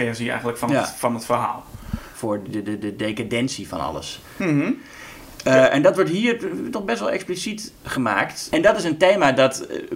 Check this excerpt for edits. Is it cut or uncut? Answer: cut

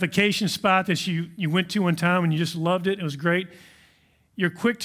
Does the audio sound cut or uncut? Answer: uncut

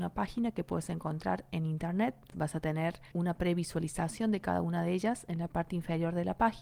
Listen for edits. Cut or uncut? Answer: cut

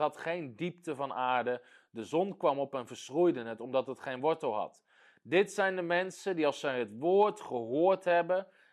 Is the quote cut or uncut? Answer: uncut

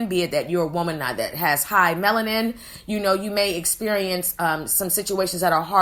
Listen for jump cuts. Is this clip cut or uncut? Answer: uncut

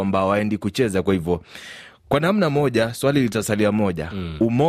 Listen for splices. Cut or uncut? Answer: uncut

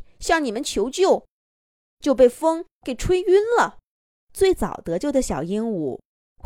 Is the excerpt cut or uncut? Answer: cut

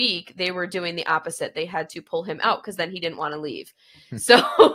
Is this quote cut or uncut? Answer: uncut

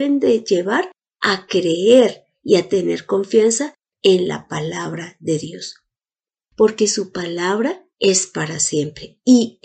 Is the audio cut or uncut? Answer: cut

